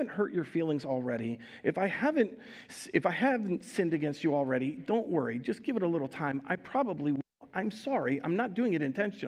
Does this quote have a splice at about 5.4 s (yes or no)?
no